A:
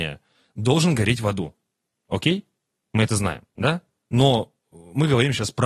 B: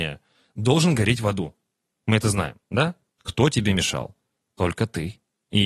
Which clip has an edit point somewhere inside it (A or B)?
B